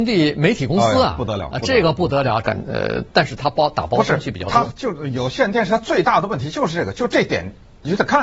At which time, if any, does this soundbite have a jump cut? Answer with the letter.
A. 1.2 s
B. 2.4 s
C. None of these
B